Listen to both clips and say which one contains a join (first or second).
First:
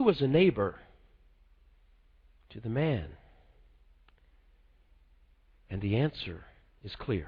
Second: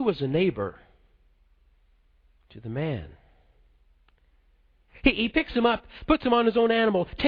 second